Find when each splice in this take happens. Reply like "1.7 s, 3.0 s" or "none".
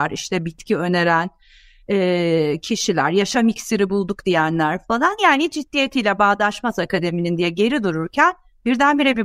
none